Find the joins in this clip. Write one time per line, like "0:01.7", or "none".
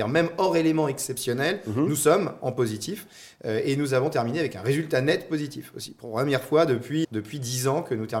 0:07.0

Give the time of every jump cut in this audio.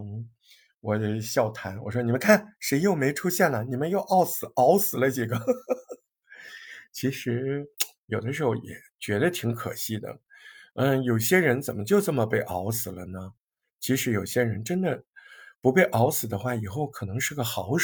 none

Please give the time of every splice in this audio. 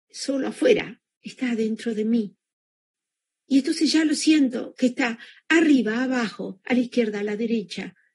none

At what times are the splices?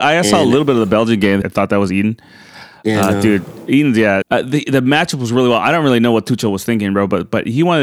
0:01.4
0:04.2

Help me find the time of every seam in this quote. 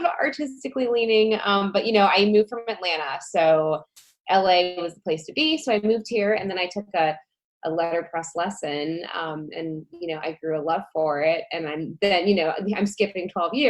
none

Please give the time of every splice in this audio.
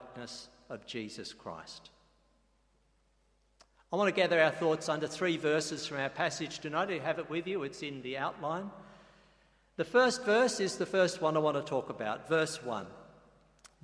none

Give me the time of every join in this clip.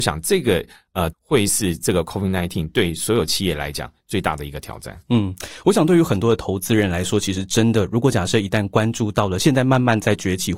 0:01.1

